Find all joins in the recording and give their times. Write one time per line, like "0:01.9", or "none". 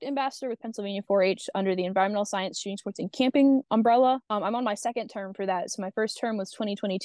none